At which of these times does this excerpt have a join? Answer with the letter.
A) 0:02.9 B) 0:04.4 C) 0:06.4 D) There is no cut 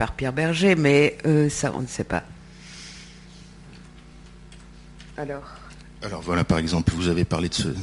D